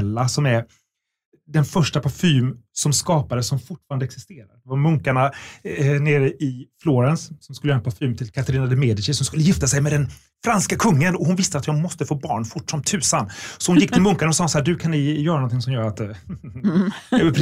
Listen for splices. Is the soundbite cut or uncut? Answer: uncut